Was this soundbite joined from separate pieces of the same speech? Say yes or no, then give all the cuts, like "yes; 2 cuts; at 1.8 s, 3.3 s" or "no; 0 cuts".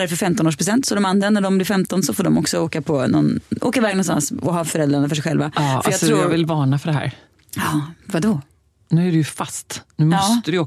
no; 0 cuts